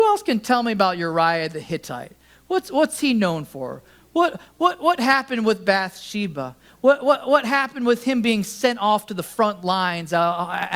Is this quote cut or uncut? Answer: uncut